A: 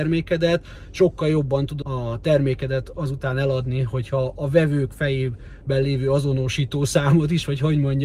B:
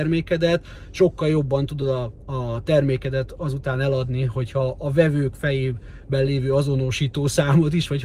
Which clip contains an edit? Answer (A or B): A